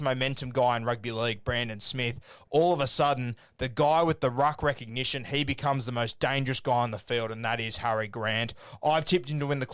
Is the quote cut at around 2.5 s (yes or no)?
no